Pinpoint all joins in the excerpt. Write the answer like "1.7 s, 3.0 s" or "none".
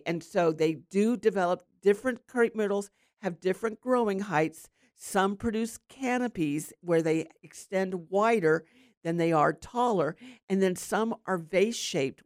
1.7 s